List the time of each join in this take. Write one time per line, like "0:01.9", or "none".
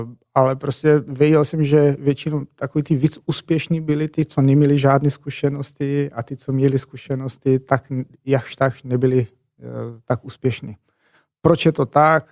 none